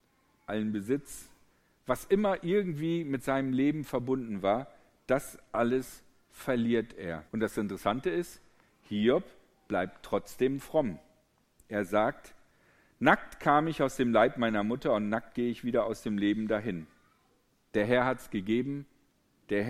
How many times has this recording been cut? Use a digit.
1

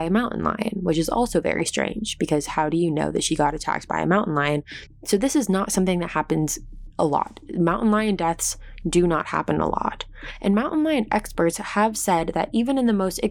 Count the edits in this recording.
1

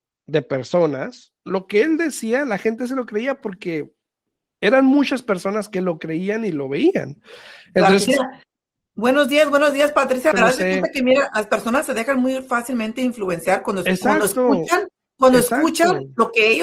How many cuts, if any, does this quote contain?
2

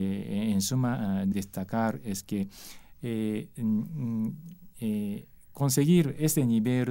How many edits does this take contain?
1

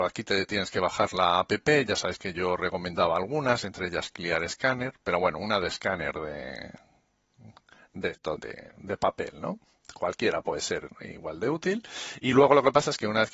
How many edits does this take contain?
1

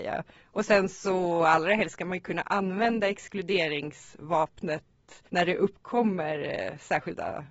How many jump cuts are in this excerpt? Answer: 1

